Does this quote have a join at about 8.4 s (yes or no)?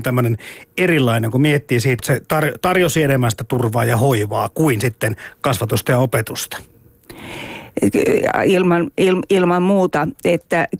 no